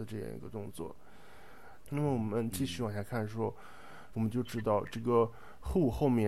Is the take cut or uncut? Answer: cut